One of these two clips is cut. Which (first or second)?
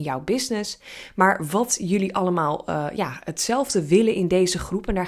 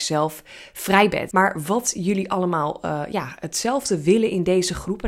second